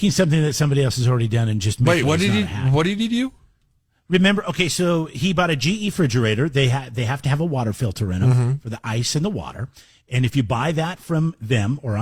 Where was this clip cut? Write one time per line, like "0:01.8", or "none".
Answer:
0:02.0

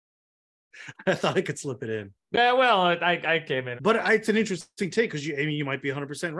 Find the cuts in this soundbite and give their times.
0:03.8

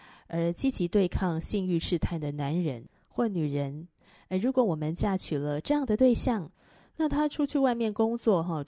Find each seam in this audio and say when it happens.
none

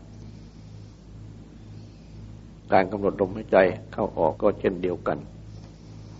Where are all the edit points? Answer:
0:04.3

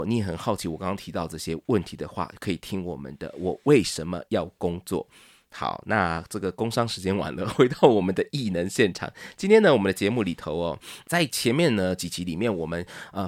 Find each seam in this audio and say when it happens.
none

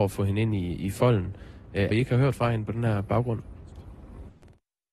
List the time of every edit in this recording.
0:01.9

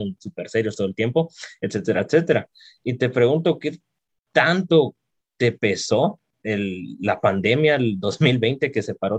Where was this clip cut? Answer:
none

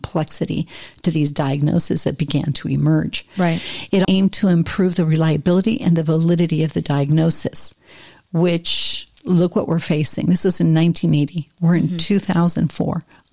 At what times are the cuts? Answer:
0:04.0

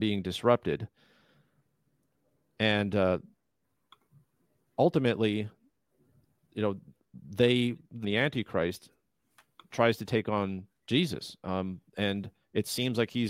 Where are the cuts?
0:08.0

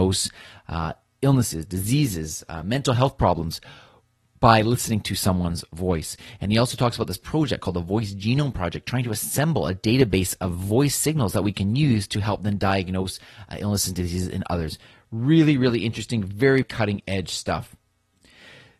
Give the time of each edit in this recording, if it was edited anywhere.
0:16.6

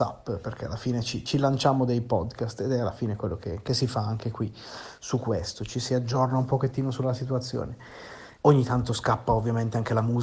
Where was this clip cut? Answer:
0:08.4

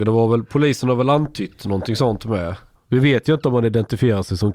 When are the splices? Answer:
0:02.7

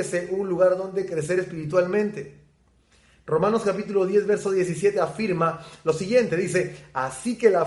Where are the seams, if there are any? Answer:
none

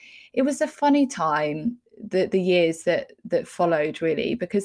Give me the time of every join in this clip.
0:01.9

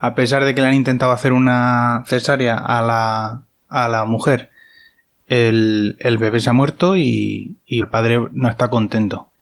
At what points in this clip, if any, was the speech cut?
0:07.8

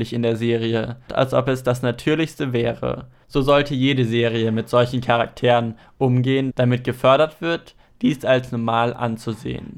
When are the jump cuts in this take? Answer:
0:01.1

